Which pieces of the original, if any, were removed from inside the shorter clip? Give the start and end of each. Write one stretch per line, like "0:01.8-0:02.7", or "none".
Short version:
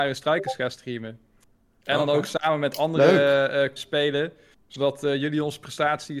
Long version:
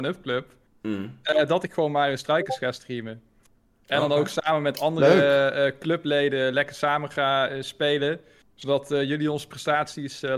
0:05.8-0:07.6